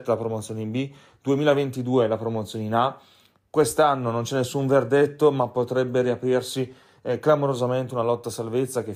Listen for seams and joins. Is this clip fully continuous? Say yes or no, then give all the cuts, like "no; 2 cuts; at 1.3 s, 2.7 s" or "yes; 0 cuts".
yes; 0 cuts